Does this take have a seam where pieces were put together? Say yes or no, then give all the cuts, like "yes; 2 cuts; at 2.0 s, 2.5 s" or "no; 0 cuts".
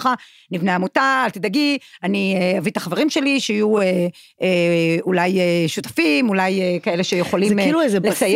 no; 0 cuts